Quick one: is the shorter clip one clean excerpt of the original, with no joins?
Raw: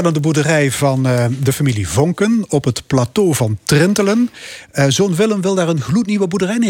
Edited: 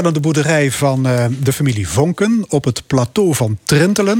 yes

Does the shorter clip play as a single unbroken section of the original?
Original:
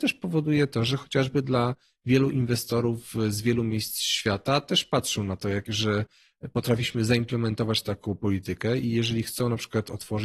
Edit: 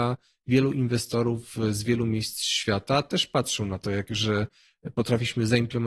yes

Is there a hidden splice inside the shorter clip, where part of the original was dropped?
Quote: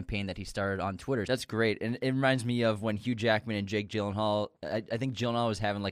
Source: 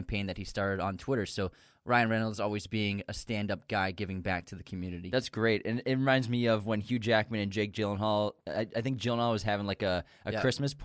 yes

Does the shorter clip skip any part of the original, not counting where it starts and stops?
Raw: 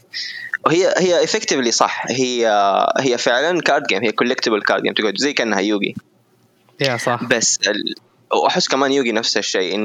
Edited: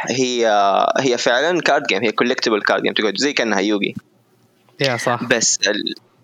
no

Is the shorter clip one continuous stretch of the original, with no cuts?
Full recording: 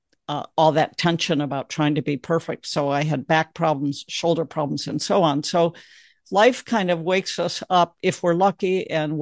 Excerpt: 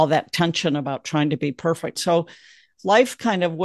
no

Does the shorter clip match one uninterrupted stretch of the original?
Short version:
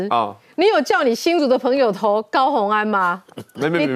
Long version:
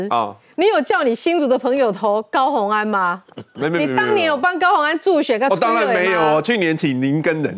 yes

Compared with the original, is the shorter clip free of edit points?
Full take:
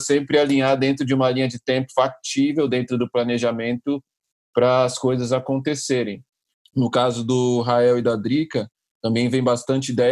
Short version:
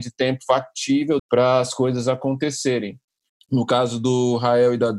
no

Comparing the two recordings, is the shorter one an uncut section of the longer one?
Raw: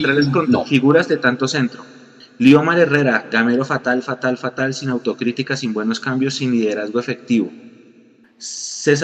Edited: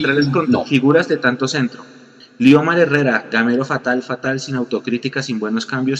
no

